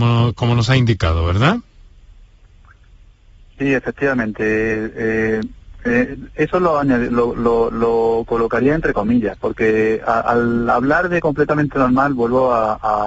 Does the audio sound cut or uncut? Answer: uncut